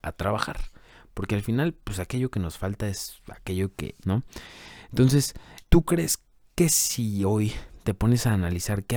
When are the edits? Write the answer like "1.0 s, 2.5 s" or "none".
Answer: 4.0 s, 5.6 s